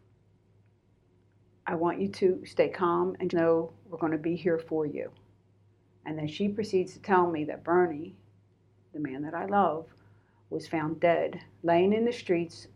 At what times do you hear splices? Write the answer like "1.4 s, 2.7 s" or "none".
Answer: 3.3 s